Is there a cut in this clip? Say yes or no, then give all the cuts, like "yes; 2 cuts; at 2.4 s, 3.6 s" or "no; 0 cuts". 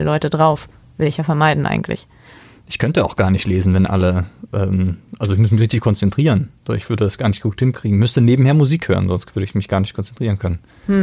no; 0 cuts